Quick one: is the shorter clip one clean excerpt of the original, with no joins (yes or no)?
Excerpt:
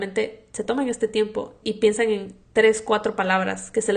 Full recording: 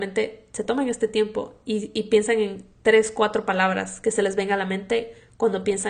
no